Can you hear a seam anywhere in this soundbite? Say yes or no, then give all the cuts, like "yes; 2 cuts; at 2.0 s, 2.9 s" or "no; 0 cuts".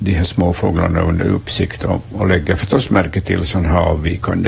no; 0 cuts